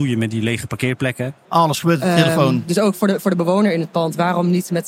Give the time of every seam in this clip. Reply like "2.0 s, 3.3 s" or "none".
1.4 s